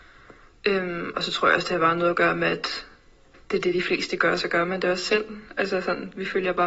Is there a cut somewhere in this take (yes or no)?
no